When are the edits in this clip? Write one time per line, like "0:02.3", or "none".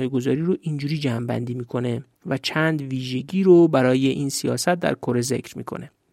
0:02.1